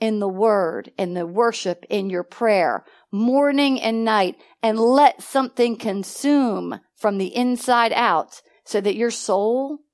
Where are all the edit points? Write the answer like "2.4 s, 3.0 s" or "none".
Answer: none